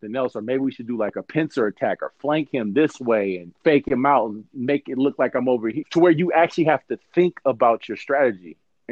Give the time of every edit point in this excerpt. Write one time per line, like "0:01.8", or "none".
0:03.6
0:05.8